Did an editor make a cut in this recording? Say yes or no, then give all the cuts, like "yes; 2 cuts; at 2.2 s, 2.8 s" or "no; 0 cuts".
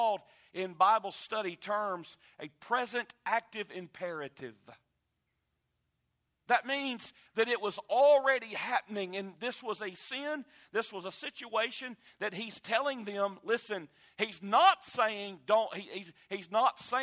no; 0 cuts